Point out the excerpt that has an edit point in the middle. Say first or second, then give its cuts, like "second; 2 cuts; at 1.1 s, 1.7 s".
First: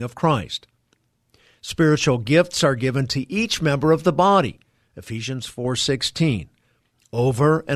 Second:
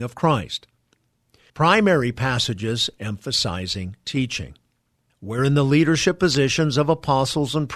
second; 2 cuts; at 1.5 s, 5.1 s